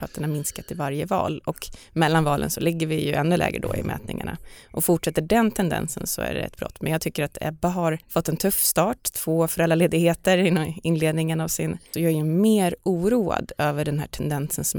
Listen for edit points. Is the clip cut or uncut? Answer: cut